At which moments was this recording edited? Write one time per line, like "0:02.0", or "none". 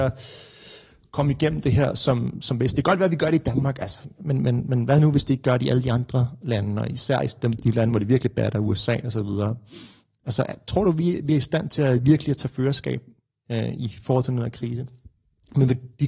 none